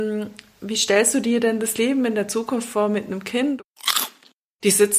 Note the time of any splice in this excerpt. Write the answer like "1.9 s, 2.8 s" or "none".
none